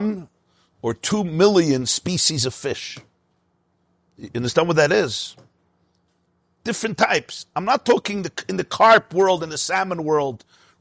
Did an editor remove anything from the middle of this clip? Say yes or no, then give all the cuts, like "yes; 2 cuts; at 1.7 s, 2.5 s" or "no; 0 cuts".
no; 0 cuts